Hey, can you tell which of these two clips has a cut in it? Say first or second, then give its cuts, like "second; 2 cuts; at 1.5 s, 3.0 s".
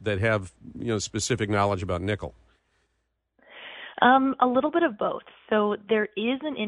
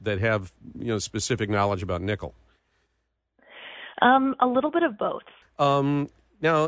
second; 1 cut; at 5.4 s